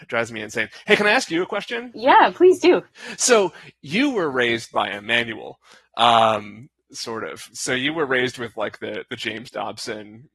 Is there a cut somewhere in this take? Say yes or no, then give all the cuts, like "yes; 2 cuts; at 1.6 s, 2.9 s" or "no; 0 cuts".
no; 0 cuts